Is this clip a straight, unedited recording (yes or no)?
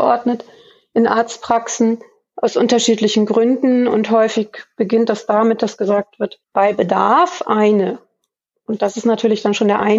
yes